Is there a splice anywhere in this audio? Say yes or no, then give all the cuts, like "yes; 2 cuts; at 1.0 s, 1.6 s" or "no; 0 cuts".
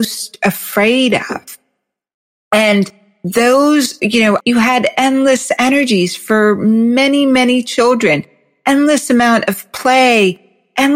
yes; 1 cut; at 4.4 s